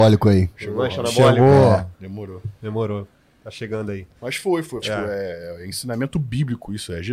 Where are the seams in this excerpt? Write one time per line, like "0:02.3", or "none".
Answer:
0:04.8